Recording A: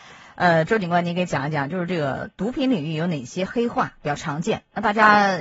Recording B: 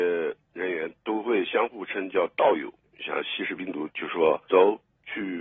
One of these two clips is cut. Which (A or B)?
B